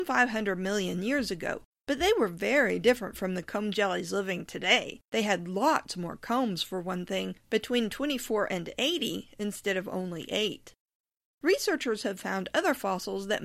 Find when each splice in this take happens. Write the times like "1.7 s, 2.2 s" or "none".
5.1 s